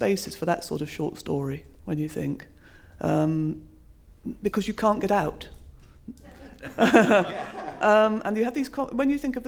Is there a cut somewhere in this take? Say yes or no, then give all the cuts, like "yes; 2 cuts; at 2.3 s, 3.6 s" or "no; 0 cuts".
no; 0 cuts